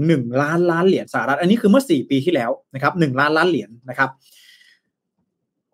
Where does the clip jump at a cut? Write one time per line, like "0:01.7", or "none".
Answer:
none